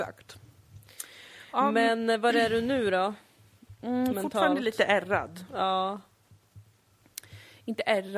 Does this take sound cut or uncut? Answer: uncut